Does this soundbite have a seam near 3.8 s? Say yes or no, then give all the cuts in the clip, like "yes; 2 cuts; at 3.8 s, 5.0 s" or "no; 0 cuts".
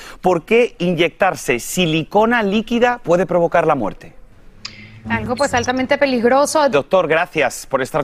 no; 2 cuts; at 5.0 s, 6.7 s